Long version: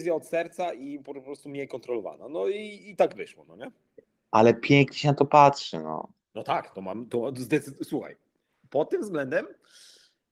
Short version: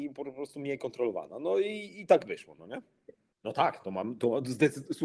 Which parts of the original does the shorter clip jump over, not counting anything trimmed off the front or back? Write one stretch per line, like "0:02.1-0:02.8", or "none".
0:04.2-0:06.2